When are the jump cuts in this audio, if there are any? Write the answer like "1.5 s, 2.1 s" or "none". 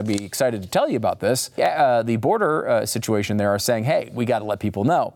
1.6 s